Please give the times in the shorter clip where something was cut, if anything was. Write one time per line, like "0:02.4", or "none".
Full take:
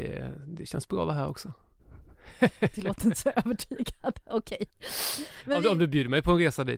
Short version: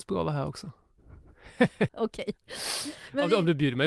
0:01.9